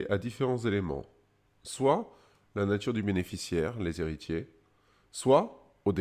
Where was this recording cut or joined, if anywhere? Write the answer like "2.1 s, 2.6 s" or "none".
none